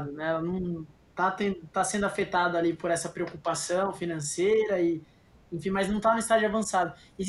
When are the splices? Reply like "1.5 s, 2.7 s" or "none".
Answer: none